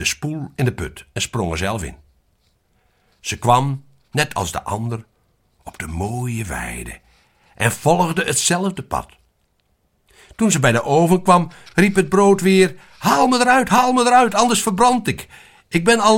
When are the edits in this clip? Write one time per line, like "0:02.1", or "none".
none